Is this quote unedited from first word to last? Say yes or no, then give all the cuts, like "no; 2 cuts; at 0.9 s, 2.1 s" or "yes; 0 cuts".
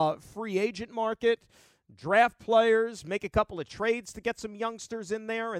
yes; 0 cuts